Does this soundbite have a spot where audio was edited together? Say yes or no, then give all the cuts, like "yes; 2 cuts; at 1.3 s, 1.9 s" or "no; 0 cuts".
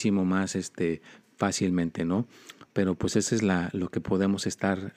no; 0 cuts